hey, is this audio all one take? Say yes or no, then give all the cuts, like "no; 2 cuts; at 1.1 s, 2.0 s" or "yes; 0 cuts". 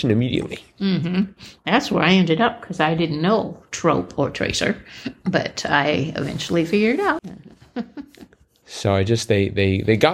no; 2 cuts; at 7.2 s, 8.6 s